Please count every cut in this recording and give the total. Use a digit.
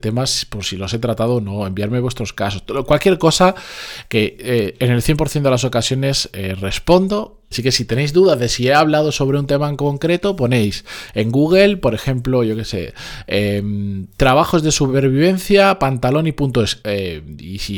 2